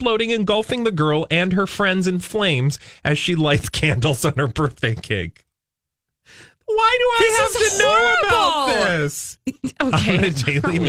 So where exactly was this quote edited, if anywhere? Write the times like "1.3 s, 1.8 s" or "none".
9.4 s